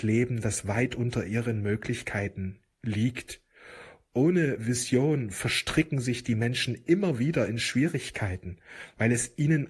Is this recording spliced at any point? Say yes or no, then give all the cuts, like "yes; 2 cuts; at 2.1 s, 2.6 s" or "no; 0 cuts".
no; 0 cuts